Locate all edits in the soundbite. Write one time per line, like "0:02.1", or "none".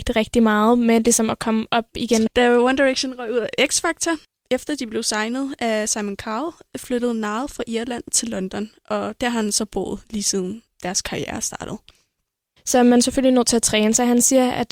0:02.3
0:12.6